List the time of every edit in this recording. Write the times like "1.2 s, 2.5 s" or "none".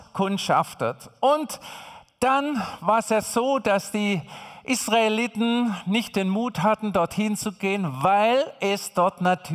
none